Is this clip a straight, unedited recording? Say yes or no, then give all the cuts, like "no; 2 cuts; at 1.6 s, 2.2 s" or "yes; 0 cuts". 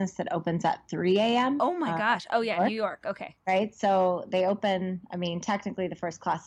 no; 1 cut; at 1.6 s